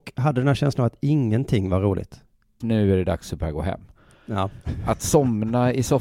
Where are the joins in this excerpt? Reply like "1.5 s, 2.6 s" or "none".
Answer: 2.6 s